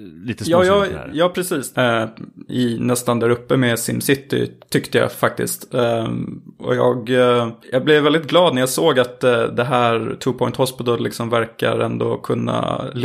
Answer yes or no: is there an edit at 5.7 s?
no